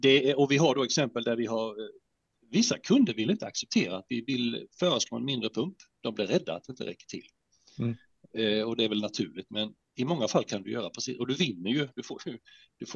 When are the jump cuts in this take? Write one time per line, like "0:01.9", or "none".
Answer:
0:09.8